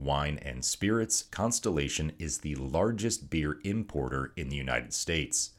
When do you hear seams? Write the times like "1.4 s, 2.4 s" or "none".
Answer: 1.3 s

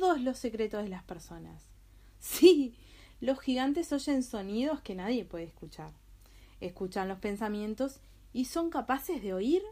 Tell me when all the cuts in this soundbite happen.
none

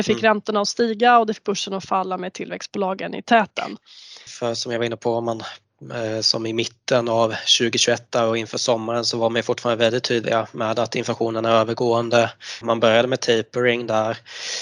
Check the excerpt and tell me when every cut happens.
4.3 s, 12.6 s

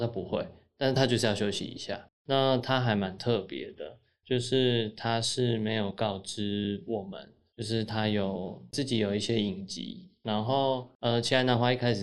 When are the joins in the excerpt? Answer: 2.1 s

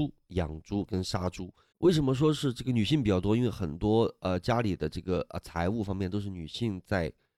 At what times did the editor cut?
1.7 s

